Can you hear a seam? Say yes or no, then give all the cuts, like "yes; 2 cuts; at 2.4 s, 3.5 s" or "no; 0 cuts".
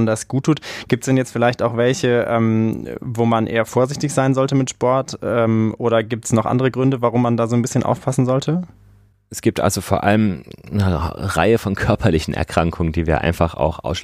no; 0 cuts